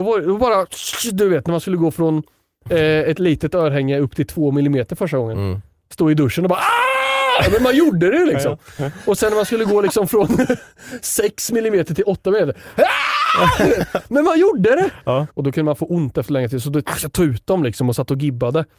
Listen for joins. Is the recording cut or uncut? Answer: cut